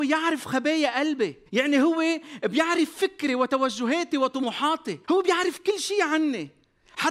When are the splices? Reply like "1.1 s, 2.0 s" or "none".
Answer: 1.5 s, 5.0 s